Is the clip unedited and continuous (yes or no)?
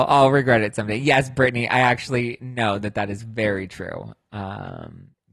yes